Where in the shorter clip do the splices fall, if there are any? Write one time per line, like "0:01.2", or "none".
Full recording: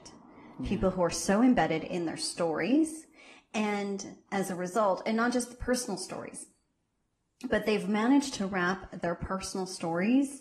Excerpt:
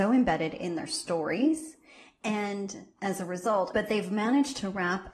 0:03.7